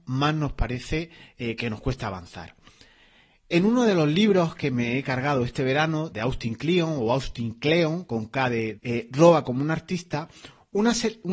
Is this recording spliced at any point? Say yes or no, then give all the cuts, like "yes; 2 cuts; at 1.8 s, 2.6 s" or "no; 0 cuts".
yes; 2 cuts; at 6.1 s, 8.8 s